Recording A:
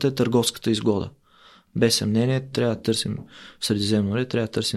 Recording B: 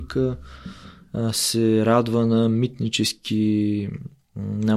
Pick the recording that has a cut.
A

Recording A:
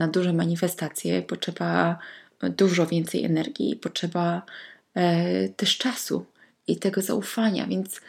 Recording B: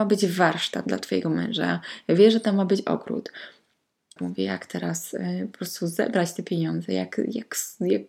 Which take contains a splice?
B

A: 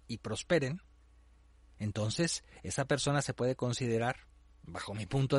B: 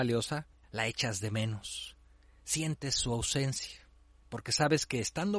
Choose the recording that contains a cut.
B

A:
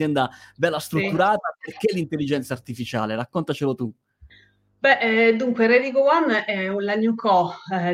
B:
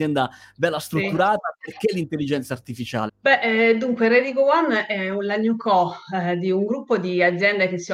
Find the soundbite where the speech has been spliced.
B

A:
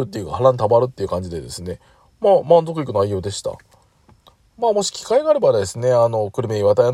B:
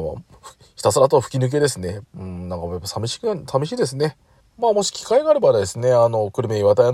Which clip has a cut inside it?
B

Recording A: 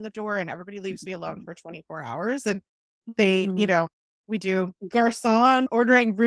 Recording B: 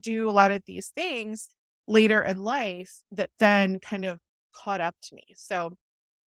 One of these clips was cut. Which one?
A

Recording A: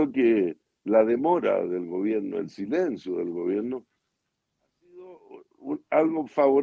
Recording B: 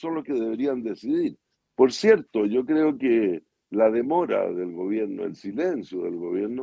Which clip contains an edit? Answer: B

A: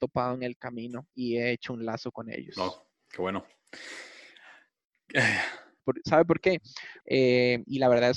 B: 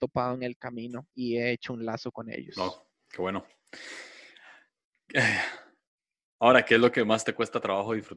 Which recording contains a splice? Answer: A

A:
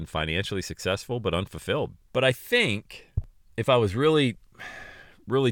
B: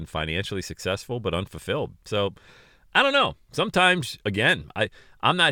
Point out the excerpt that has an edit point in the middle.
A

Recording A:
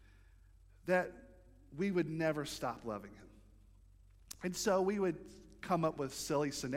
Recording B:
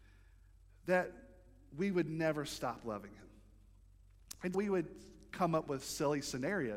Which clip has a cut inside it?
B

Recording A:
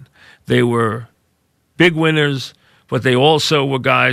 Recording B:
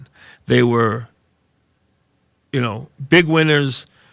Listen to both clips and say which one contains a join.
A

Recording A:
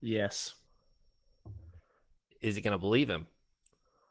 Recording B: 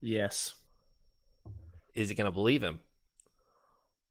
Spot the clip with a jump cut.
B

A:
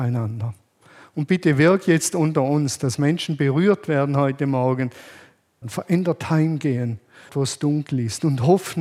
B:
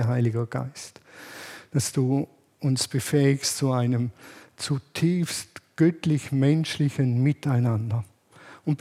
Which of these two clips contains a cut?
A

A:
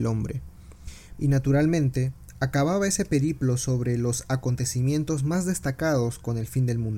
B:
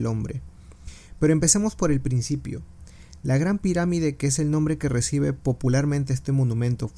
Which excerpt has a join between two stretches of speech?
A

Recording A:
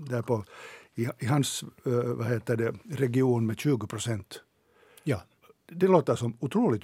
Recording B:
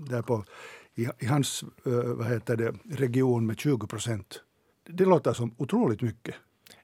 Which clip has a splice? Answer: B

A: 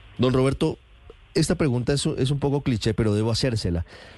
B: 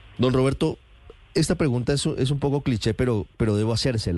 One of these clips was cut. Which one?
A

